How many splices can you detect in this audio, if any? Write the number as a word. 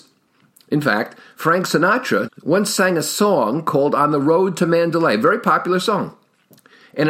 one